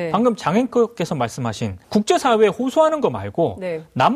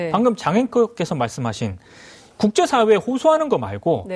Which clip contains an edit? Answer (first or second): first